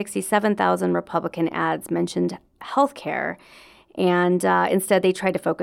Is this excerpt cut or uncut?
uncut